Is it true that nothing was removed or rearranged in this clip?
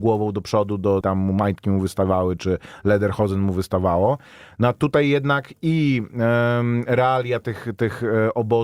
no; 1 cut; at 1.0 s

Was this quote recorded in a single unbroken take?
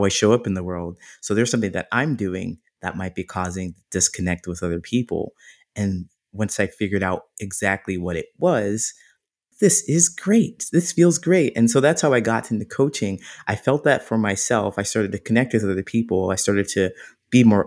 no; 1 cut; at 9.5 s

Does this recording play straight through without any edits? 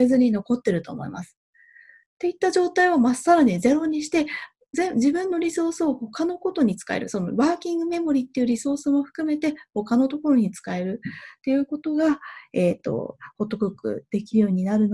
yes; 0 cuts

